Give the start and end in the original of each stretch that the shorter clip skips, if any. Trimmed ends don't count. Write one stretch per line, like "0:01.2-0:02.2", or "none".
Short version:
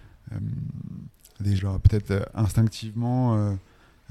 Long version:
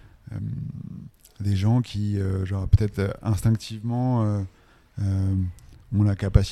0:01.6-0:02.5